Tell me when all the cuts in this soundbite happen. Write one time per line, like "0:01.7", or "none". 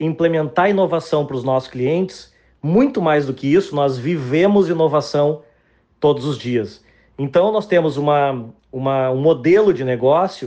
none